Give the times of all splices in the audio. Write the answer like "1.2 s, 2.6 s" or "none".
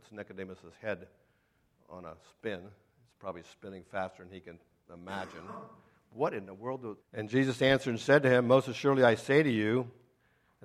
7.0 s